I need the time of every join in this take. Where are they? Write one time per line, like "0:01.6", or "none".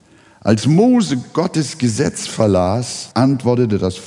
0:03.1